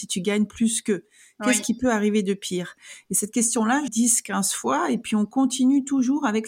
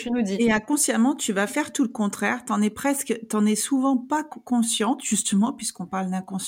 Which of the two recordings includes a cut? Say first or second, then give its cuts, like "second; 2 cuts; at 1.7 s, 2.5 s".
first; 1 cut; at 3.9 s